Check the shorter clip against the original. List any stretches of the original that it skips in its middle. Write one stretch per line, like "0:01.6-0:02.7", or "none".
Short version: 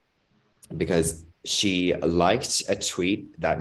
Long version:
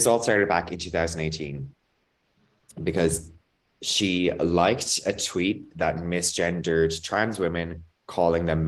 0:03.4-0:03.7